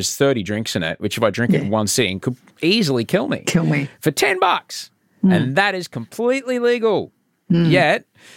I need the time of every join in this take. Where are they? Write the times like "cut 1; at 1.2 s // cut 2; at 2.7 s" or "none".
none